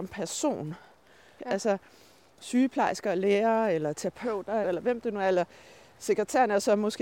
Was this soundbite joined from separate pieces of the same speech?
yes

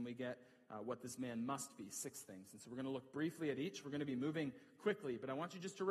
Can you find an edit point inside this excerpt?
no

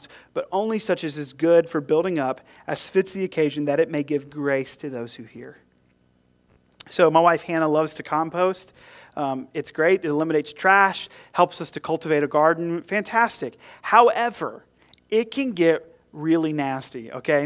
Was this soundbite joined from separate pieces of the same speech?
no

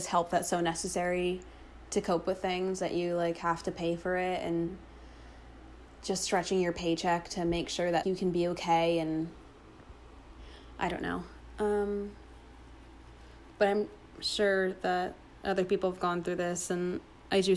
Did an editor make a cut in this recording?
yes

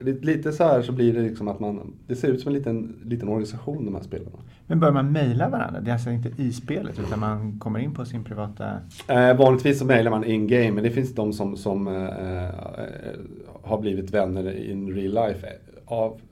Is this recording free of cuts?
yes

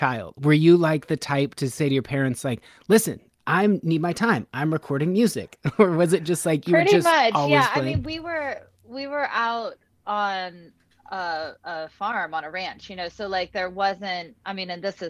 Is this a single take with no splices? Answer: yes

